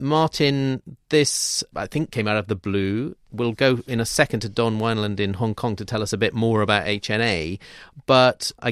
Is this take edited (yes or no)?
no